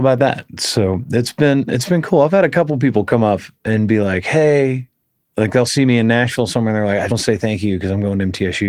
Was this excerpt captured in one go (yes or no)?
no